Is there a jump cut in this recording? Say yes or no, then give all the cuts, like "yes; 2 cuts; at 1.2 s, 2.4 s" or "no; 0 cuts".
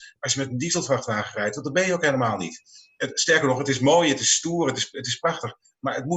no; 0 cuts